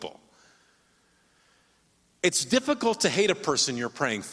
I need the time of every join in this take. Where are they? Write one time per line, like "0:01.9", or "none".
none